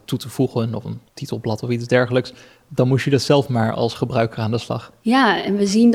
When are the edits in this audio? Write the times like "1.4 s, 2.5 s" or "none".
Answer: 1.1 s